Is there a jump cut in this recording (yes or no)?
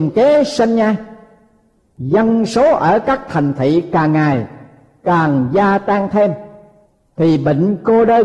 no